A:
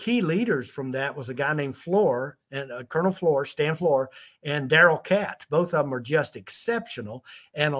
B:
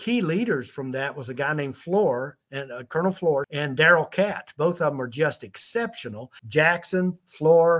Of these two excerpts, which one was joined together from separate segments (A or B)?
B